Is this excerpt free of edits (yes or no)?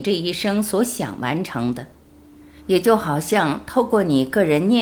yes